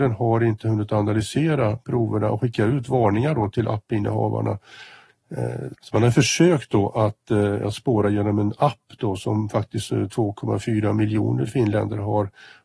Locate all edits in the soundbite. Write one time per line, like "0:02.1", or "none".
0:05.7